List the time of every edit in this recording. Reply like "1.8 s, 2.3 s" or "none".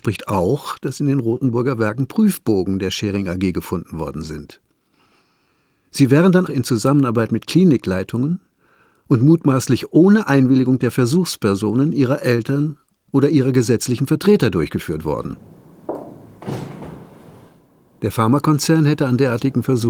6.5 s